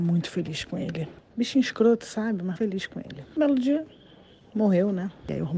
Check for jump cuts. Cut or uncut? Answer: cut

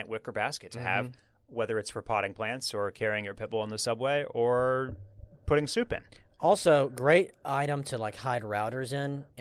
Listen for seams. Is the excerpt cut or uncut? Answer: uncut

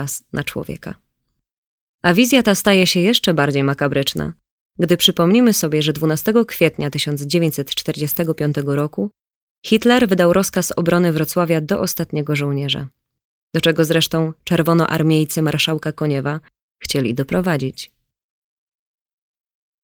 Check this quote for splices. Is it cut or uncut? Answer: uncut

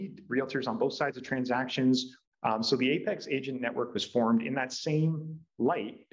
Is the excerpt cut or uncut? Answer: cut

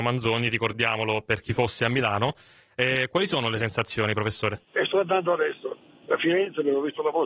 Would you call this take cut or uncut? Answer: cut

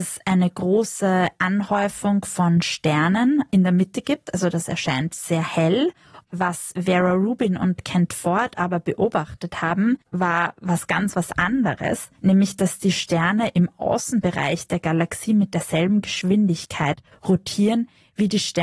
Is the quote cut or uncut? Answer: cut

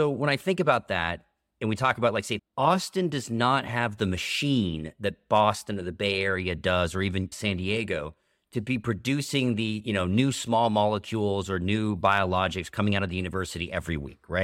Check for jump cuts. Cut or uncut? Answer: cut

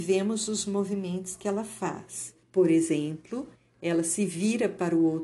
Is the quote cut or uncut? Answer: cut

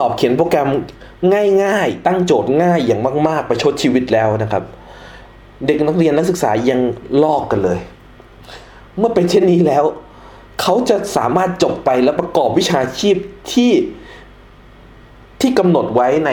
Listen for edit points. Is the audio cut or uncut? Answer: cut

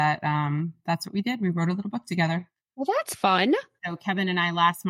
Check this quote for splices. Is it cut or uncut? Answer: cut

